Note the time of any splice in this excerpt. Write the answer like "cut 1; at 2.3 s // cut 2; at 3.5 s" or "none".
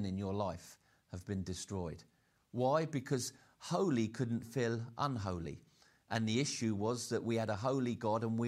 none